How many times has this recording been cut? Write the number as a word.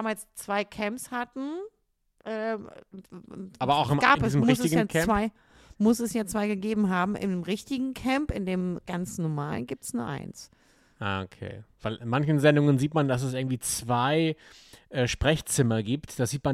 zero